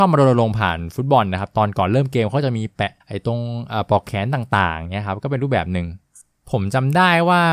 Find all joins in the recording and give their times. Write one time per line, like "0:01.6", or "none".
0:03.0